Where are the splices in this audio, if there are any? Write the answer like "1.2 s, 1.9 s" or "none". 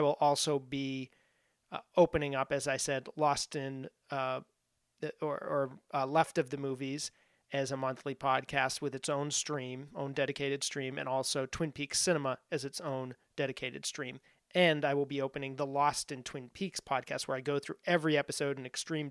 none